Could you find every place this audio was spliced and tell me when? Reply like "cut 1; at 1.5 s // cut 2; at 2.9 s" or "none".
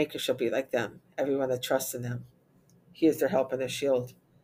cut 1; at 2.8 s